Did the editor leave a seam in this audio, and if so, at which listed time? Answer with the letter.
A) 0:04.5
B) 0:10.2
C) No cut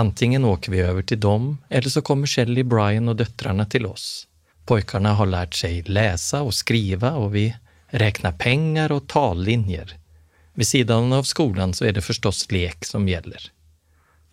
A